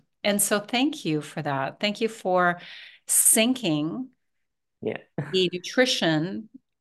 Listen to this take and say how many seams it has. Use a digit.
0